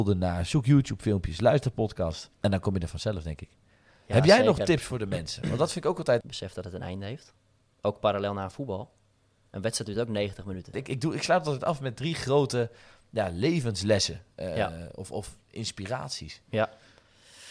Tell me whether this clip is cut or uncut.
cut